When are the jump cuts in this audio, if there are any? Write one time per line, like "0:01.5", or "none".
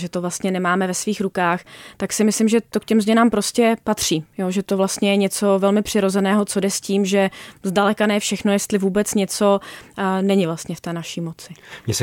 none